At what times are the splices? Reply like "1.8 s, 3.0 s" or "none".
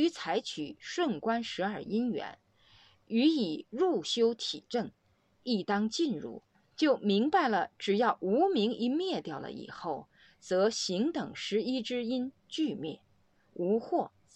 13.3 s